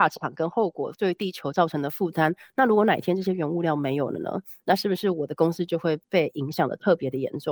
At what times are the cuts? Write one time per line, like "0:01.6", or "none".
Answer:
none

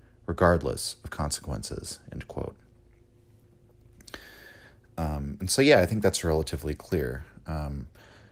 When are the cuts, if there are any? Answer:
none

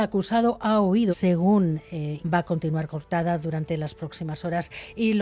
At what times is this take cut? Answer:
0:01.1
0:02.2

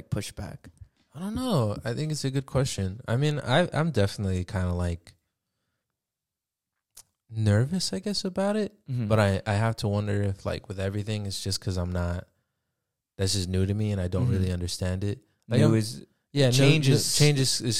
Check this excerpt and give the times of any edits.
none

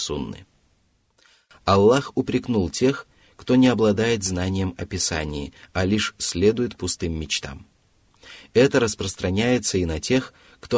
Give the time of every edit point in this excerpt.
none

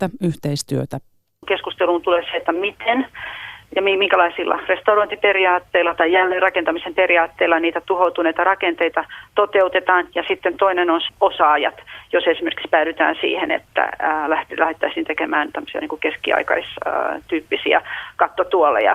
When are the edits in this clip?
0:11.1

